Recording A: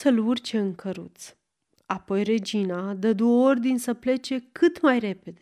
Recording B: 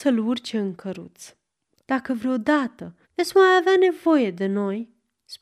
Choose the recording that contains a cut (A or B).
B